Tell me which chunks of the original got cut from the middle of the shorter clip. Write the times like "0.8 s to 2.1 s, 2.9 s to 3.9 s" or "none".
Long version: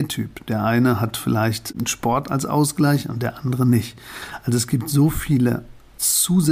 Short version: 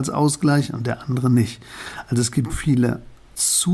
4.9 s to 5.1 s